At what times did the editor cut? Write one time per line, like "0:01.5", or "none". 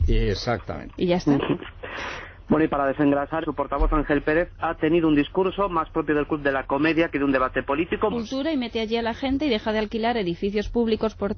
0:03.4
0:08.1